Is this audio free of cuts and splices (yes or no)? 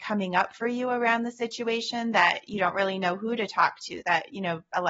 yes